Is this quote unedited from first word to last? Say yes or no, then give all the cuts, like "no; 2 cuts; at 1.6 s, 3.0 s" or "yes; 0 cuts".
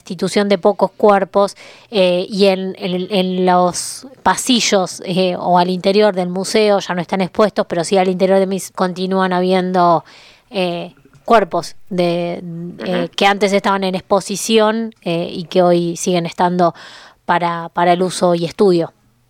no; 1 cut; at 8.7 s